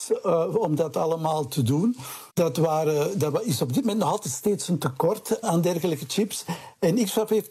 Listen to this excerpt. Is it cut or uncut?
cut